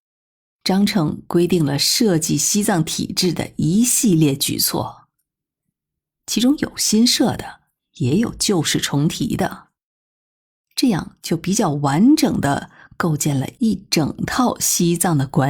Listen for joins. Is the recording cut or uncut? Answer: uncut